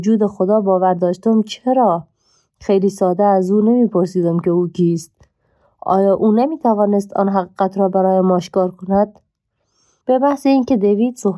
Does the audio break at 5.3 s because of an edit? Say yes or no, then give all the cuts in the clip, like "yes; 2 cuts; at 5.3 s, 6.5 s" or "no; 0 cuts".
no; 1 cut; at 10.0 s